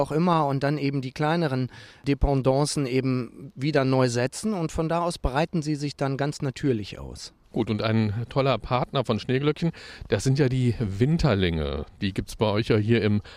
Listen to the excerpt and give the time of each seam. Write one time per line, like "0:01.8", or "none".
0:07.4